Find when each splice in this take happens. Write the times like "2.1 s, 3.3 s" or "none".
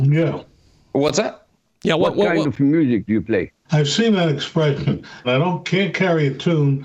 3.6 s, 5.2 s